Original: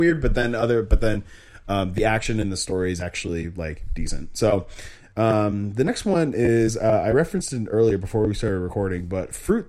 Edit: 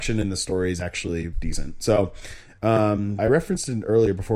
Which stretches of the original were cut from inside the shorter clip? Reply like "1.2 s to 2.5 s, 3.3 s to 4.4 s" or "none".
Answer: 3.5 s to 3.9 s, 5.7 s to 7.0 s